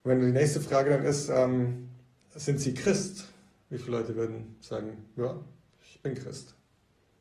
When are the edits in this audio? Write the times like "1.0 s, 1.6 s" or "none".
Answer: none